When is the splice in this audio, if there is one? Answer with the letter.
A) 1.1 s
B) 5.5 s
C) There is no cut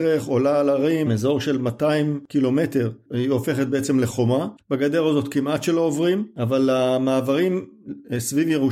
A